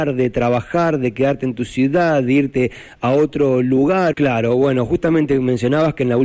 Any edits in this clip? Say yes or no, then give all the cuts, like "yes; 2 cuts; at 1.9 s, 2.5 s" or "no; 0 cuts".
yes; 1 cut; at 4.1 s